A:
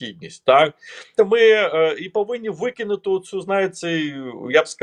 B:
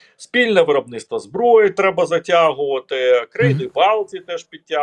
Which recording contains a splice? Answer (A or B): A